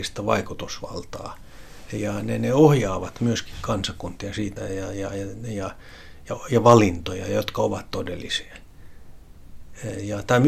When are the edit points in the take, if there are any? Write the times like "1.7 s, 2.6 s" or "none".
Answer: none